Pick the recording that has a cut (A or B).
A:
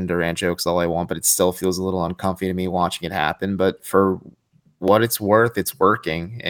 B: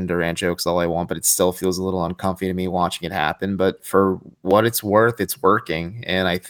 B